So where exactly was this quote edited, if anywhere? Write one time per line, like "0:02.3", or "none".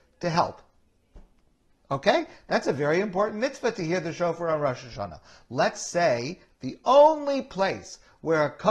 0:01.8
0:06.5